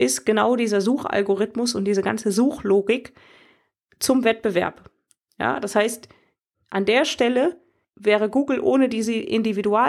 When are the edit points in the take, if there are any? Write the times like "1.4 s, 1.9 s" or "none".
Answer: none